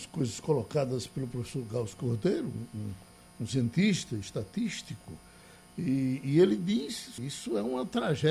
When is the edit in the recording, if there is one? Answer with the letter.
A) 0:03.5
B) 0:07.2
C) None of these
B